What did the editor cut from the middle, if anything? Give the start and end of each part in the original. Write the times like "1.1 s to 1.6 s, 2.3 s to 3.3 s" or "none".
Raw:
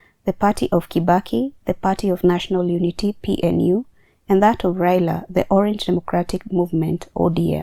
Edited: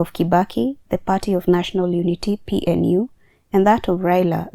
none